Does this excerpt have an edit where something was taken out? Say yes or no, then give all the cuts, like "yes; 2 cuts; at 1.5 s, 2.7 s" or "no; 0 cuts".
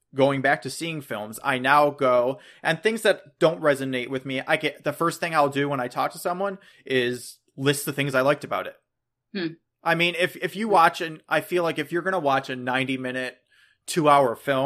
no; 0 cuts